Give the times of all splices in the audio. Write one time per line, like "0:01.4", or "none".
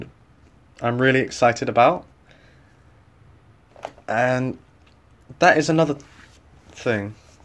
none